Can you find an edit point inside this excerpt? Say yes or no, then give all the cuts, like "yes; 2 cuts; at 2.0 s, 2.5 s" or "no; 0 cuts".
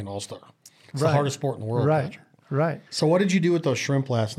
yes; 1 cut; at 2.9 s